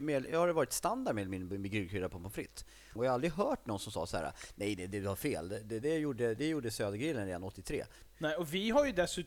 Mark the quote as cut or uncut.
cut